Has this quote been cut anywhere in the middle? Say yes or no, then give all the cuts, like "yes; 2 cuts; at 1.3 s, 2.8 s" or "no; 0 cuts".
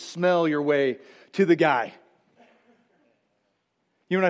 no; 0 cuts